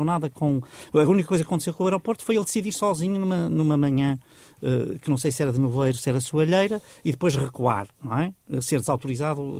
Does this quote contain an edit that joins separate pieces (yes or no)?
no